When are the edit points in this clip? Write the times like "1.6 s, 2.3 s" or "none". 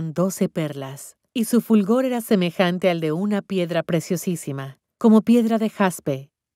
1.3 s